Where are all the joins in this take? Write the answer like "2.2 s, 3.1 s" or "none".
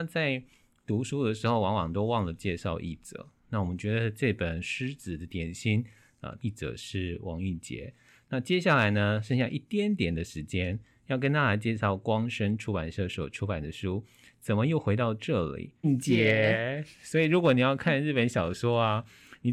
6.4 s, 15.8 s